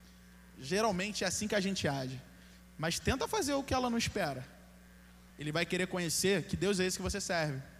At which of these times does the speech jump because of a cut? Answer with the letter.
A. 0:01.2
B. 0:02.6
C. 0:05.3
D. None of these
C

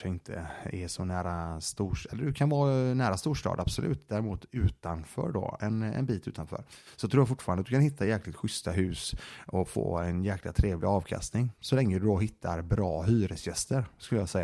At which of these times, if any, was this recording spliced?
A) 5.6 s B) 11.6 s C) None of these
C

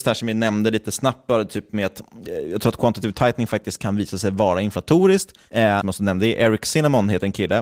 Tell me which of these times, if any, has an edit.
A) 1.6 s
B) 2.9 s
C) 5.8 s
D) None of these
C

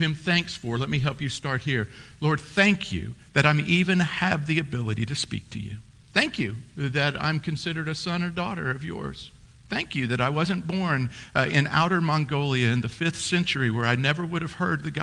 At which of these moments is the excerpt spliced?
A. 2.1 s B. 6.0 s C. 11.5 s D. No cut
B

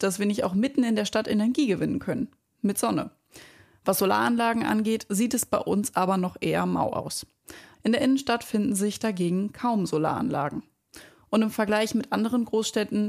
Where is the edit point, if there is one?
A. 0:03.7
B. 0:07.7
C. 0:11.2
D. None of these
B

